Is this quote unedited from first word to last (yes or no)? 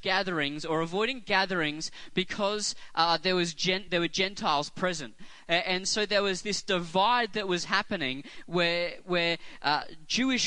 yes